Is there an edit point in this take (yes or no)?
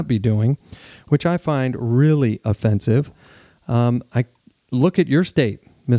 no